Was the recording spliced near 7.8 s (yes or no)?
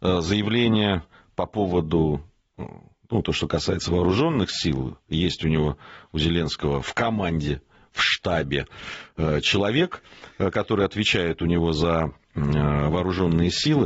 no